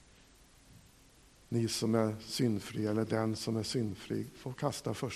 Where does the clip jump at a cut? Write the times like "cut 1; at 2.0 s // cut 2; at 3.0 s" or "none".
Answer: none